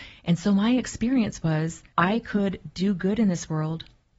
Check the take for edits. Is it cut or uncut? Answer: cut